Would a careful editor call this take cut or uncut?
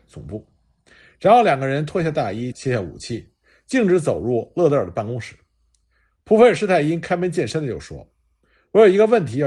cut